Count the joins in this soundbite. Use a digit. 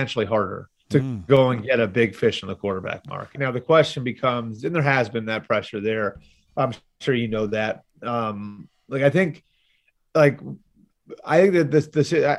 1